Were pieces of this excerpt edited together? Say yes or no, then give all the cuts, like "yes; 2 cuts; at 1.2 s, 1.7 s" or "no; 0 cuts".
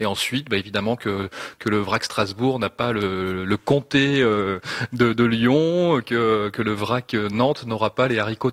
no; 0 cuts